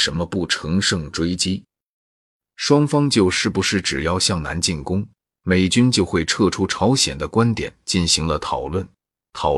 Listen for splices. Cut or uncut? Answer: uncut